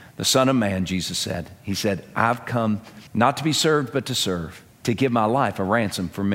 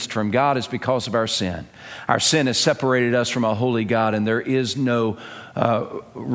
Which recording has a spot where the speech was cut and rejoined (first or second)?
first